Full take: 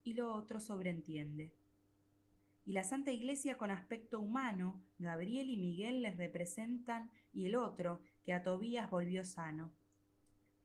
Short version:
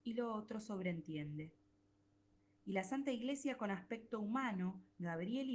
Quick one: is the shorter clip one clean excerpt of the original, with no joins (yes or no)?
yes